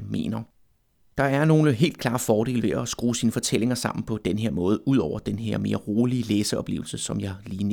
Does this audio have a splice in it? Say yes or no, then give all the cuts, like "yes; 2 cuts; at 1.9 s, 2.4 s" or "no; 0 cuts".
no; 0 cuts